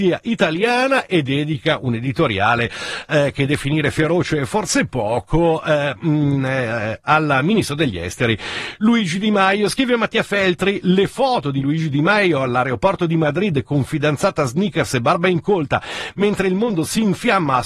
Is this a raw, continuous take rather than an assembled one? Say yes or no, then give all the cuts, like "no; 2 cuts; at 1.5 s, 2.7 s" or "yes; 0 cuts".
yes; 0 cuts